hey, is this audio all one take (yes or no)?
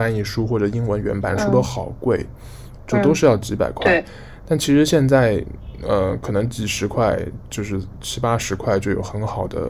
yes